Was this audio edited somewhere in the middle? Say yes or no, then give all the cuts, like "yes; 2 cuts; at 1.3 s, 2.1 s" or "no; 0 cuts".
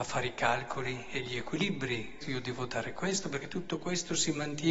yes; 1 cut; at 2.2 s